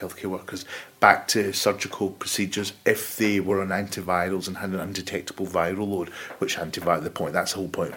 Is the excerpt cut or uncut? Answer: uncut